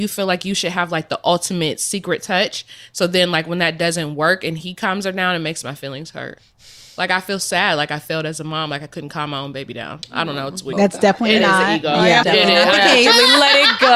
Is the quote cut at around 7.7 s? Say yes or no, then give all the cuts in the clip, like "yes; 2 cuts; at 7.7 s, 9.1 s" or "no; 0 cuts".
no; 2 cuts; at 10.7 s, 12.2 s